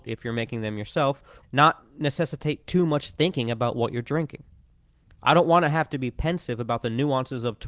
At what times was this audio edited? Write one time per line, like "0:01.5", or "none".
0:01.4